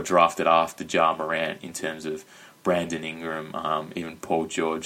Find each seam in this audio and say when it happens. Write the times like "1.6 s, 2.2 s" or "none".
none